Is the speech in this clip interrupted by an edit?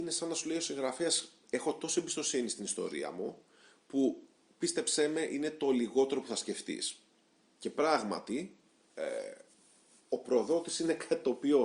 no; 0 cuts

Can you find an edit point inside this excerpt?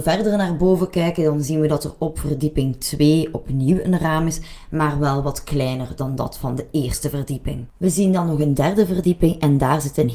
yes; 1 cut; at 7.7 s

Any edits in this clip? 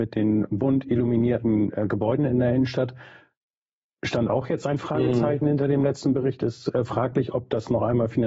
no; 0 cuts

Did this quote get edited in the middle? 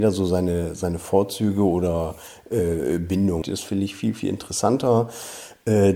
yes; 1 cut; at 3.4 s

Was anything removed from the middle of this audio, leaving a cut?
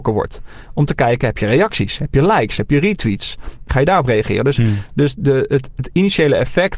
yes; 1 cut; at 3.7 s

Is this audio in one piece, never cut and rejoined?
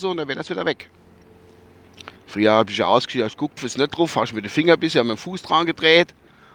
no; 2 cuts; at 2.2 s, 3.6 s

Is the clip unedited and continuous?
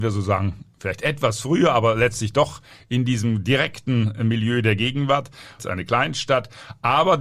no; 1 cut; at 5.6 s

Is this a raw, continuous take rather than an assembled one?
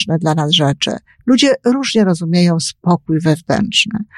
no; 1 cut; at 1.2 s

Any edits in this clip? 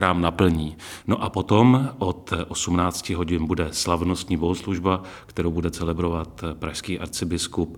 yes; 1 cut; at 1.0 s

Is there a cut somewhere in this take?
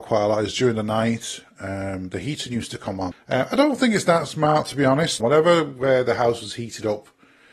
yes; 2 cuts; at 3.1 s, 5.2 s

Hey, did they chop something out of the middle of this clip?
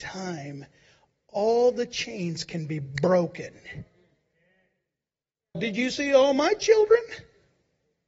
yes; 1 cut; at 5.5 s

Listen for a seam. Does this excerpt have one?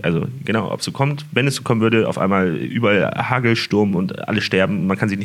no; 0 cuts

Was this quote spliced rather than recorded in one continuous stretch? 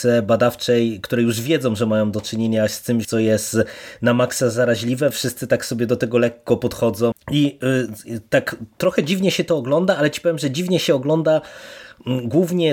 yes; 3 cuts; at 3.0 s, 5.1 s, 7.1 s

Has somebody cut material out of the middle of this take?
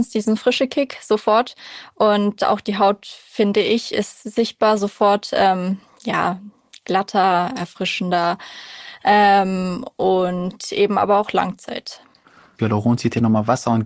yes; 1 cut; at 12.6 s

